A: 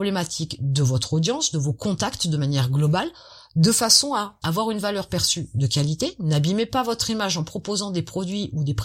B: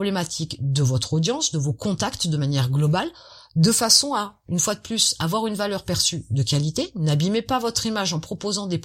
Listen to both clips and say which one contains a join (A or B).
A